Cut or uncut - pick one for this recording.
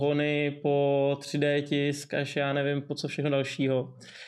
uncut